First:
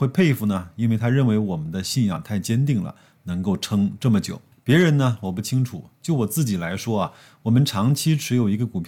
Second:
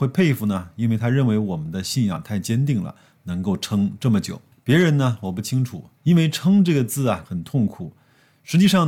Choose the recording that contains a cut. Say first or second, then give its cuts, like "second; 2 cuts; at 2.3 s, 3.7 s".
second; 2 cuts; at 6.0 s, 7.2 s